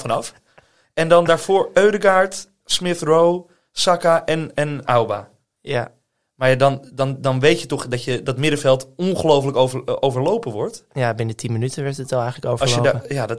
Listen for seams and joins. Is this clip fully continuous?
yes; 0 cuts

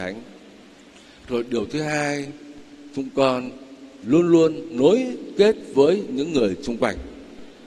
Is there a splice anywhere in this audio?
no; 0 cuts

